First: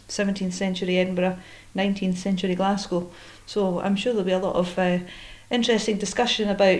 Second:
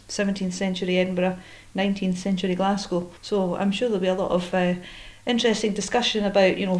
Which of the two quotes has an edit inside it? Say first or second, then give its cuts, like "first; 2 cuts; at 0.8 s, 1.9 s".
second; 1 cut; at 3.2 s